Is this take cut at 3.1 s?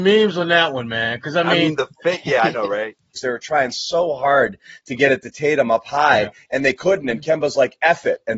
yes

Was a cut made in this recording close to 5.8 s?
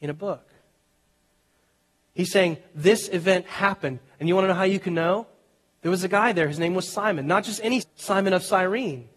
no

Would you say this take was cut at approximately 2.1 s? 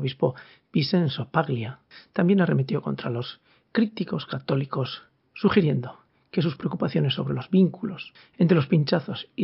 no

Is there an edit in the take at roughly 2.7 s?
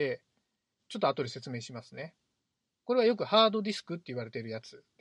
yes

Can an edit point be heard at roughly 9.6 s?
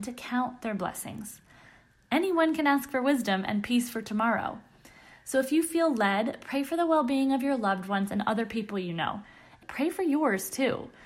yes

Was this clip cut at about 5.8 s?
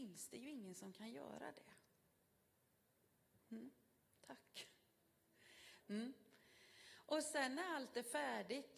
yes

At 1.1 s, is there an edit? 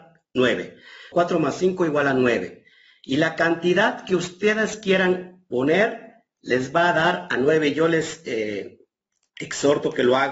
yes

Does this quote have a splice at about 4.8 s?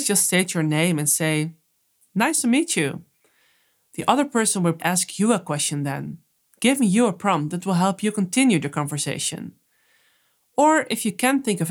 yes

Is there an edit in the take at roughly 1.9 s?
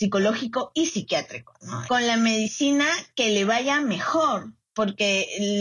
yes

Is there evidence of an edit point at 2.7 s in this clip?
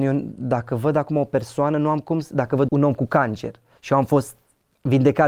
yes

